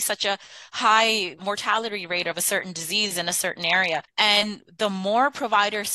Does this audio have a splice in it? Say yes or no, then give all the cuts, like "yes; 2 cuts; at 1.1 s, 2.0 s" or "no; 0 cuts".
yes; 1 cut; at 4.1 s